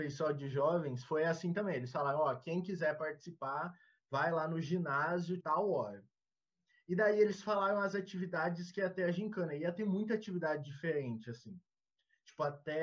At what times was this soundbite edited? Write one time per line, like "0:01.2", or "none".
0:05.4